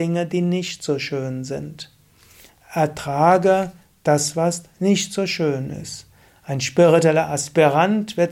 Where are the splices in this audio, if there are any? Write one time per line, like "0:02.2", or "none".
0:06.3